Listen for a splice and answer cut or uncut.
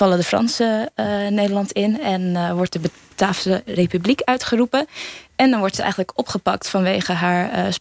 uncut